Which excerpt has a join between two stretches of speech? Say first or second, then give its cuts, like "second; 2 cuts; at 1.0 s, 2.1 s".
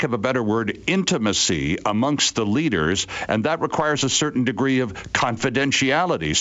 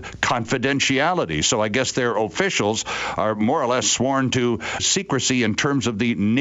second; 1 cut; at 4.8 s